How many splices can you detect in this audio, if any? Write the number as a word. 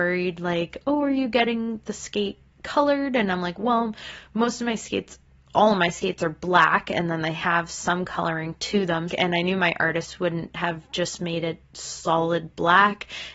one